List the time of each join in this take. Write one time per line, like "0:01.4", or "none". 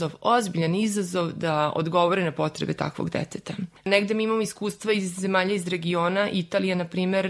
none